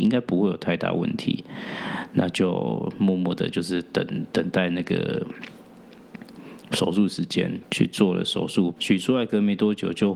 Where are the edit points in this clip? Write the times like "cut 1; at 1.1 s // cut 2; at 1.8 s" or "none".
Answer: cut 1; at 7.6 s // cut 2; at 8.8 s